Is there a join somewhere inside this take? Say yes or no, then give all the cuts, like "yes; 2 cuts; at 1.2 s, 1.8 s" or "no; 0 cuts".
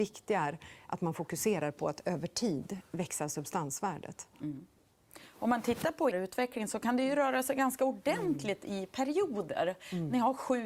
yes; 1 cut; at 6.1 s